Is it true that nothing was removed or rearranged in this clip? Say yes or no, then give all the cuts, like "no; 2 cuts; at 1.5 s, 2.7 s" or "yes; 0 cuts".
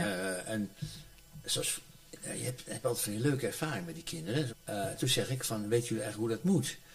no; 1 cut; at 4.5 s